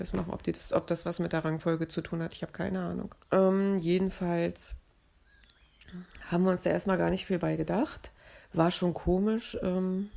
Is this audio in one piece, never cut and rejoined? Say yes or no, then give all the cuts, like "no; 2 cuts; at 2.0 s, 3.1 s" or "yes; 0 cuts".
yes; 0 cuts